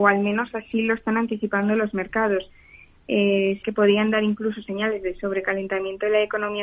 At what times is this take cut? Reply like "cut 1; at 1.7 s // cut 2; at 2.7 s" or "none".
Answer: cut 1; at 3.6 s